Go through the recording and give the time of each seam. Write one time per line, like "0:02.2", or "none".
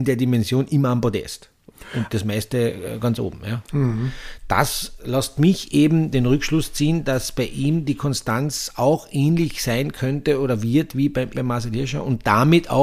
0:03.7
0:05.0
0:11.3

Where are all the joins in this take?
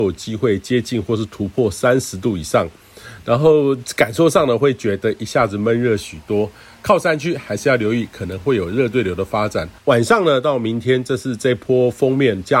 0:09.8

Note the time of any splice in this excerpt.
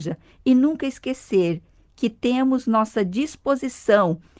none

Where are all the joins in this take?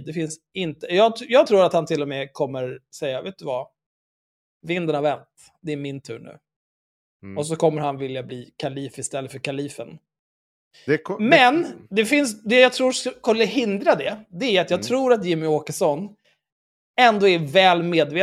none

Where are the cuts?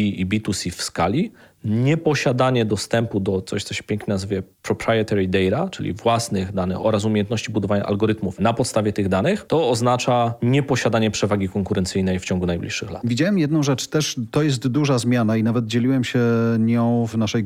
none

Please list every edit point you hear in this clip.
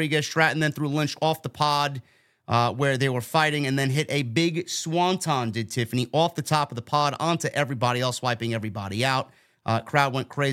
none

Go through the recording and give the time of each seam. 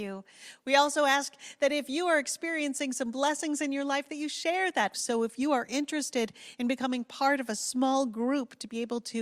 0:04.9

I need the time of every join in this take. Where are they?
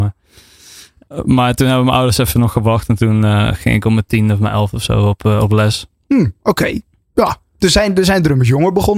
none

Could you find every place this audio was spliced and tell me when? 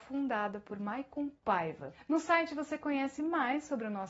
none

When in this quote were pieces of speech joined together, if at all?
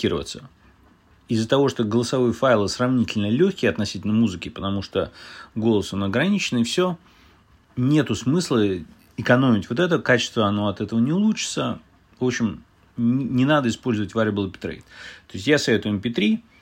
none

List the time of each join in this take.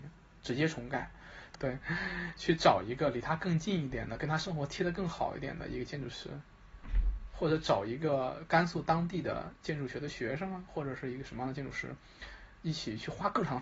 0:01.5

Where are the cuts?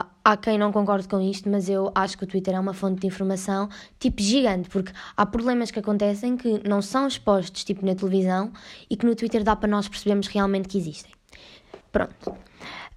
0:11.8

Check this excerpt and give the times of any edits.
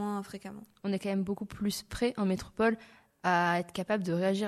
none

